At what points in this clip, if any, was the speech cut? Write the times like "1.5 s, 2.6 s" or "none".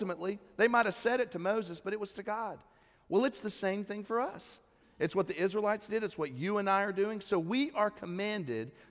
none